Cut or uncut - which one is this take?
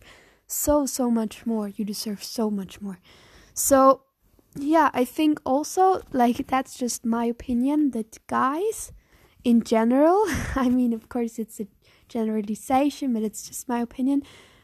uncut